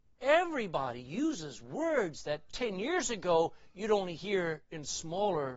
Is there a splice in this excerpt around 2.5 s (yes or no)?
yes